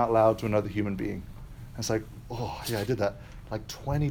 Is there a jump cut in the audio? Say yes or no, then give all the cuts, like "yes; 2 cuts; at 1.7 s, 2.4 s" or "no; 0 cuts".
no; 0 cuts